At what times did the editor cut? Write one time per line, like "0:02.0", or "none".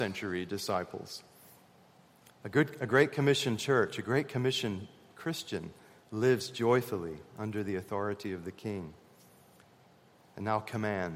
0:02.3